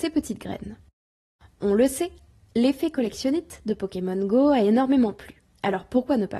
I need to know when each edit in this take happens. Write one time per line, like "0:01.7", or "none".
none